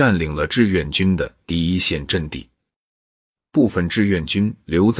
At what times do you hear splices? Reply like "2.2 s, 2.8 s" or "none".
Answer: none